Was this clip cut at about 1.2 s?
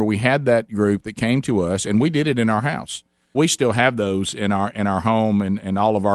no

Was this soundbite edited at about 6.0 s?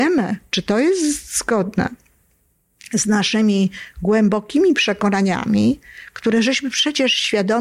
no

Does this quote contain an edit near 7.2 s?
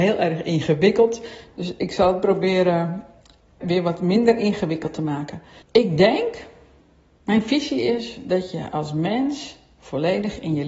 no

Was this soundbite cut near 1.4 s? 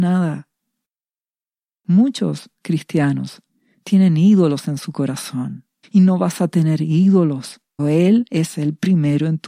no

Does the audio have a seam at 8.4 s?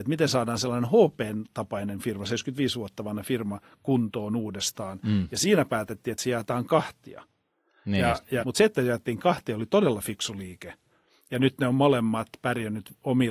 yes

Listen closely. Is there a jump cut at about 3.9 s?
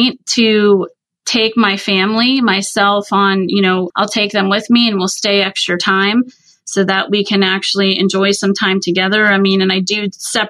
yes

